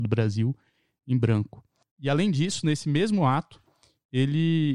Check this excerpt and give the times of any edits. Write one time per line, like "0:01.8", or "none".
0:01.8